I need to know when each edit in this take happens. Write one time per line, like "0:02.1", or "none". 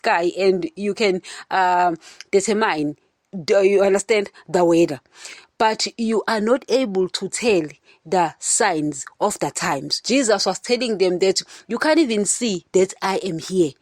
0:10.0